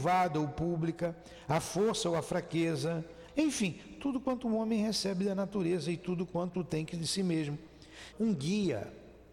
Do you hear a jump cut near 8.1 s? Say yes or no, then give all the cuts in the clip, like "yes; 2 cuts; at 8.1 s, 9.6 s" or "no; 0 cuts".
yes; 2 cuts; at 3.3 s, 8.1 s